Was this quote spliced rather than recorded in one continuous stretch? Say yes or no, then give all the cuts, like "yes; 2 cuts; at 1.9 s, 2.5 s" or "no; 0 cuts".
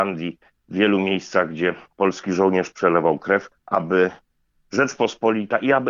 yes; 1 cut; at 3.6 s